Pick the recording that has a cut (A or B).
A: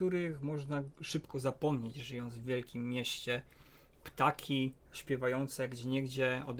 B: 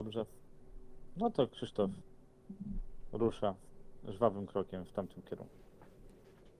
A